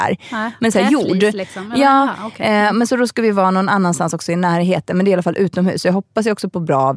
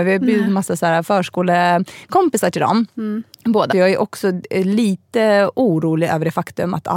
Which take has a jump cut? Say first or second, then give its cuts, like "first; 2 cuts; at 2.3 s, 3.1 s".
second; 1 cut; at 3.7 s